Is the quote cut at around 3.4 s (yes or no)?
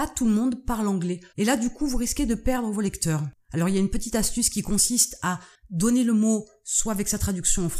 no